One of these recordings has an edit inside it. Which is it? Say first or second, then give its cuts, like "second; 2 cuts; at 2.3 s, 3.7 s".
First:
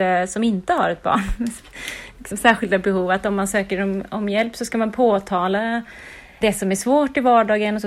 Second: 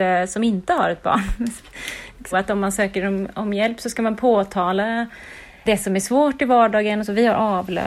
second; 1 cut; at 2.3 s